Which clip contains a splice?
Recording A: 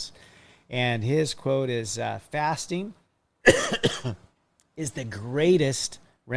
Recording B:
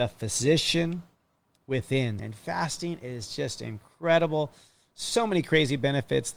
B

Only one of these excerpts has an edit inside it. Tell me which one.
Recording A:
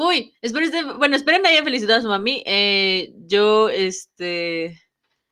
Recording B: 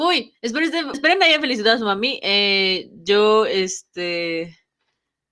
B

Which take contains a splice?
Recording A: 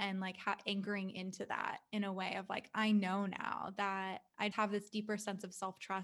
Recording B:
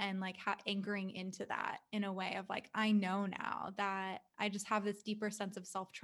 A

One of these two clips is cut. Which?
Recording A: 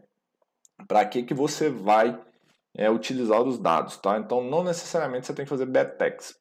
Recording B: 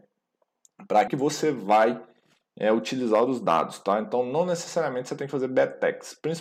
B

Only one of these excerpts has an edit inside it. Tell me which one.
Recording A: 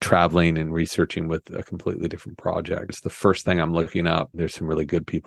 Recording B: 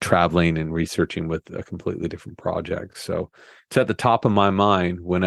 A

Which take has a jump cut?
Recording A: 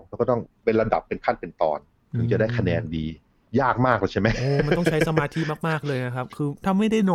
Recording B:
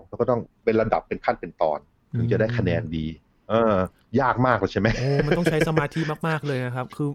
A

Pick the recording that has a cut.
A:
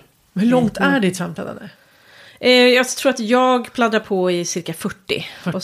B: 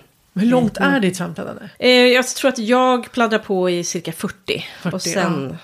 B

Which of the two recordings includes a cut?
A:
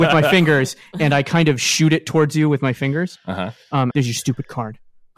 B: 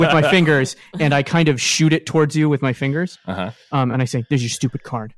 A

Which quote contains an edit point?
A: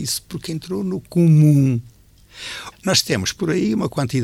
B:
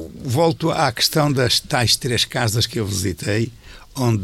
A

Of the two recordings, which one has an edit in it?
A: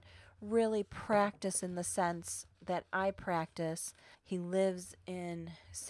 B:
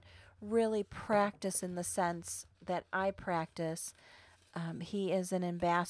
A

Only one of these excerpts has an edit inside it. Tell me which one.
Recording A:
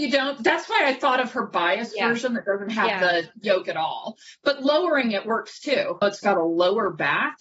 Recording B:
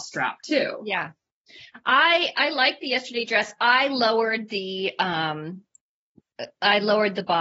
A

